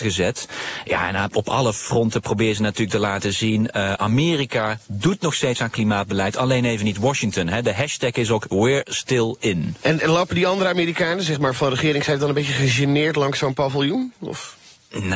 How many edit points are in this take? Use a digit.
0